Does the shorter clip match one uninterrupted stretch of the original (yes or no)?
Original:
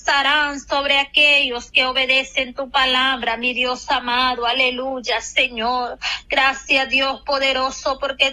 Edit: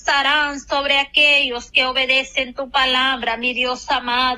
yes